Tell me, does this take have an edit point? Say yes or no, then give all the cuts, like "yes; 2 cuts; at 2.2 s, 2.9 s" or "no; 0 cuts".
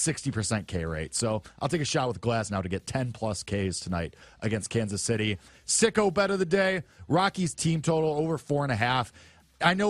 no; 0 cuts